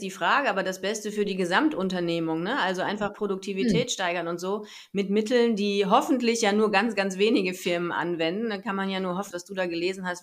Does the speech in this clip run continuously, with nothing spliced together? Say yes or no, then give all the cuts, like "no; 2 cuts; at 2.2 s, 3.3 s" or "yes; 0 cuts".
no; 1 cut; at 9.3 s